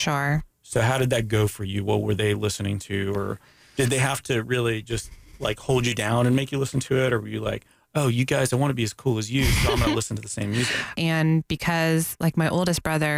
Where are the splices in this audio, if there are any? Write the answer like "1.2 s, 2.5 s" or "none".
11.0 s